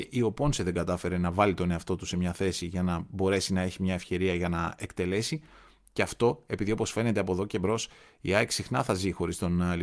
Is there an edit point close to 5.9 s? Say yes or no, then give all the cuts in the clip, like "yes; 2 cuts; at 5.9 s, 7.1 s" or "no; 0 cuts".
no; 0 cuts